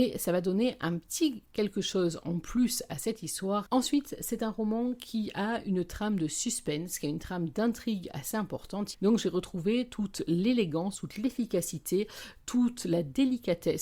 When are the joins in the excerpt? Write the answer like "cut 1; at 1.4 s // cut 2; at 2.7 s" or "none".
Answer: cut 1; at 3.7 s // cut 2; at 8.9 s

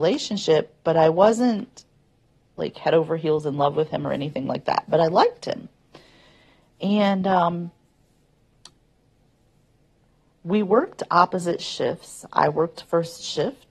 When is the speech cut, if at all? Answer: none

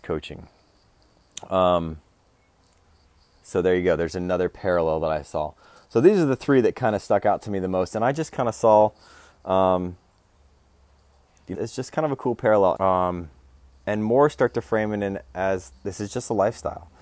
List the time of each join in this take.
cut 1; at 11.5 s // cut 2; at 12.8 s // cut 3; at 15.7 s

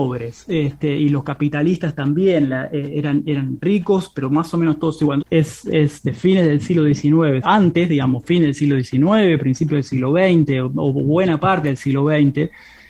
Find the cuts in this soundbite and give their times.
cut 1; at 5.2 s // cut 2; at 7.4 s

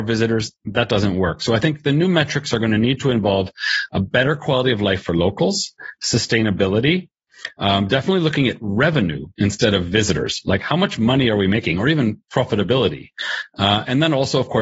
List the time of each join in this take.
none

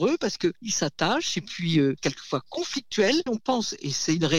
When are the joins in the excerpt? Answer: cut 1; at 2.0 s // cut 2; at 3.3 s

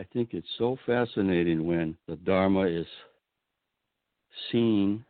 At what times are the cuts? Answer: cut 1; at 2.0 s

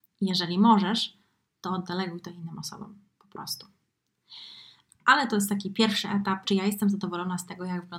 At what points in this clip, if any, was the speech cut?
cut 1; at 6.4 s

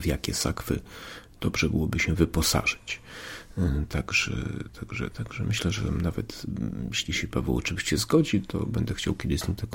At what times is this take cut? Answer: cut 1; at 5.1 s

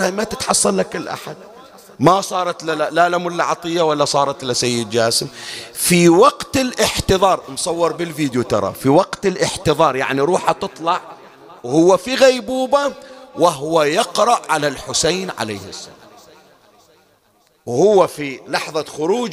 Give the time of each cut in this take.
none

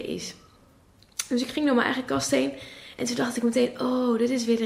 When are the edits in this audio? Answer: cut 1; at 2.9 s

